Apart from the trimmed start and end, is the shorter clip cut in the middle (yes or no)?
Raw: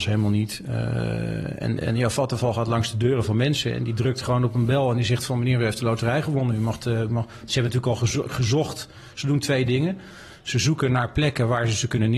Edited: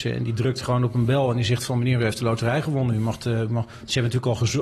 no